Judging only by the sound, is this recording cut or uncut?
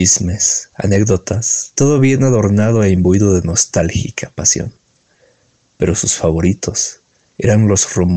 cut